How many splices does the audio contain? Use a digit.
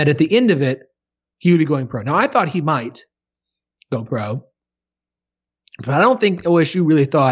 0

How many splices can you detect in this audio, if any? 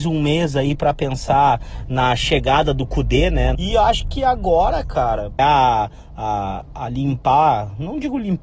2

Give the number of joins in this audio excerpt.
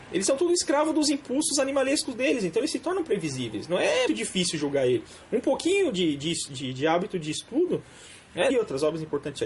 2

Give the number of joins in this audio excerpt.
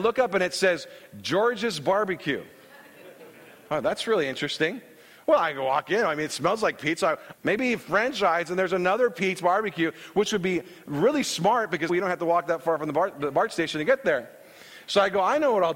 2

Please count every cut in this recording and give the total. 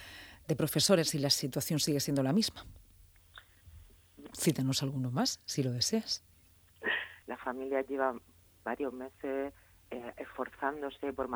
2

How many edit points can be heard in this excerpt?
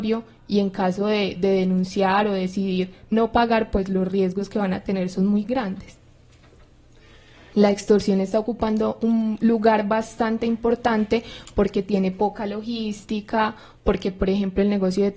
2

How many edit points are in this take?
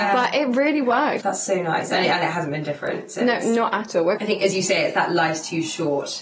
2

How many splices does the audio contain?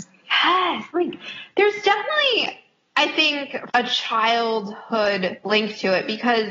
1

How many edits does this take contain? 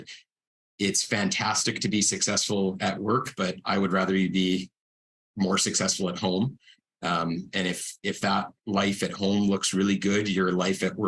0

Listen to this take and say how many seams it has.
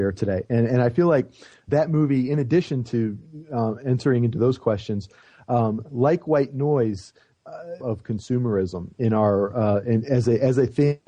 1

